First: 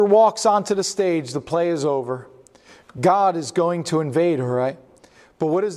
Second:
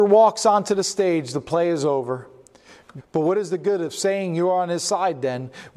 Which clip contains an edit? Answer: second; 1 cut; at 3.0 s

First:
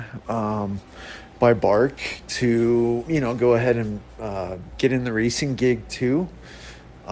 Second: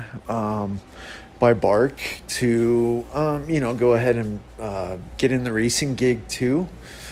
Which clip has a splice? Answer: first; 1 cut; at 3.1 s

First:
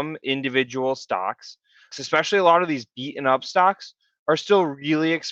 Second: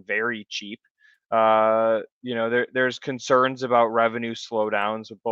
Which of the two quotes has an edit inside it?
first; 1 cut; at 1.9 s

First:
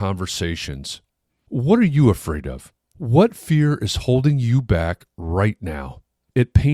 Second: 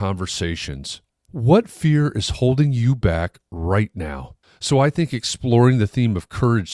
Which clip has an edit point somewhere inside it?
second; 2 cuts; at 1.2 s, 4.4 s

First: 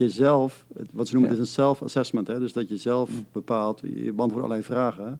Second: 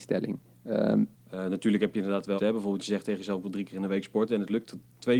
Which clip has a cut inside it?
second; 2 cuts; at 1.1 s, 2.4 s

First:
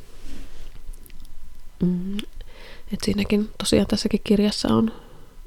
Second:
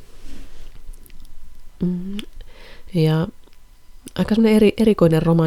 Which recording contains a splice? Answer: second; 1 cut; at 2.9 s

